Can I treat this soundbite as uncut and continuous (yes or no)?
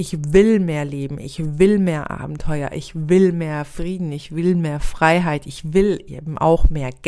yes